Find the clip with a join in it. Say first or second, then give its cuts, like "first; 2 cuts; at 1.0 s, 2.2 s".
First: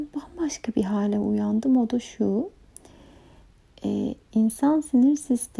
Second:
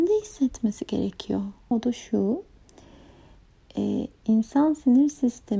second; 1 cut; at 1.7 s